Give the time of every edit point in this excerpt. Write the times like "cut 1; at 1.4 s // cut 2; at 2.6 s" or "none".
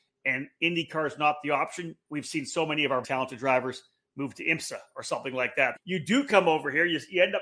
cut 1; at 3.0 s // cut 2; at 5.8 s